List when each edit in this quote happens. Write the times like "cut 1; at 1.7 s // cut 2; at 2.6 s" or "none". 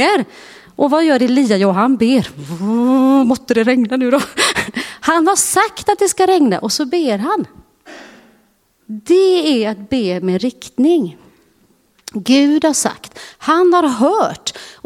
none